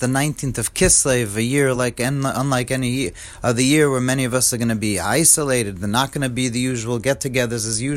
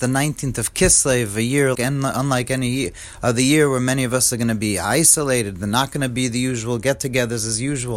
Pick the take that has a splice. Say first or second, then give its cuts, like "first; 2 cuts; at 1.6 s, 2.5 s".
second; 1 cut; at 1.7 s